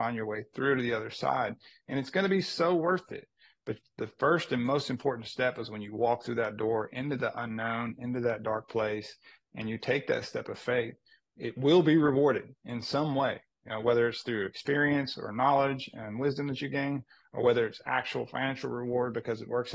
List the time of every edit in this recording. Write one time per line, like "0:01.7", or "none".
none